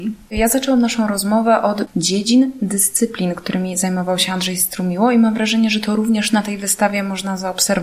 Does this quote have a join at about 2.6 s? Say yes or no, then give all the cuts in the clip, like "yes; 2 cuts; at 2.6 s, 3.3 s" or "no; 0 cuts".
no; 0 cuts